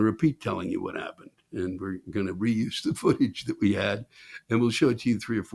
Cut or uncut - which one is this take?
uncut